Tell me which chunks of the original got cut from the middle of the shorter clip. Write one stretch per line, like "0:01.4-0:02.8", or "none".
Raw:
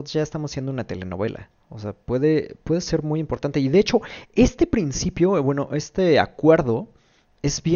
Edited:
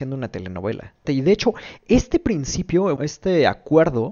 0:01.6-0:03.5
0:05.4-0:05.7